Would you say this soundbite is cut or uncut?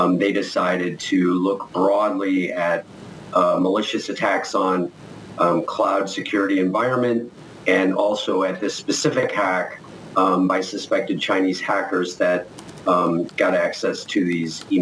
uncut